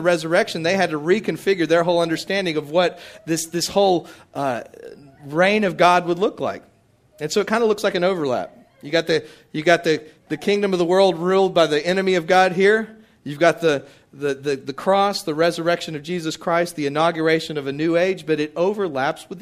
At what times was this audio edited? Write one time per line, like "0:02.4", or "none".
none